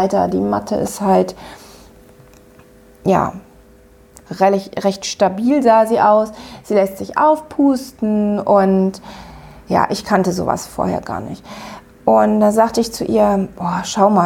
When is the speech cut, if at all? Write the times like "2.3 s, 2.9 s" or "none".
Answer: none